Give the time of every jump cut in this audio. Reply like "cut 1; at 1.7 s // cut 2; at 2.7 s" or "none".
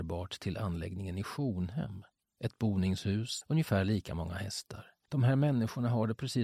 cut 1; at 3.4 s // cut 2; at 5.0 s